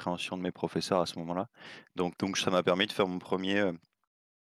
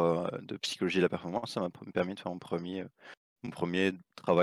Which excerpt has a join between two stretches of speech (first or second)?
first